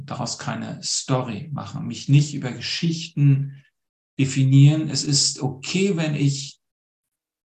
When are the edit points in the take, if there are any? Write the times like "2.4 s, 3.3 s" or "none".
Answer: none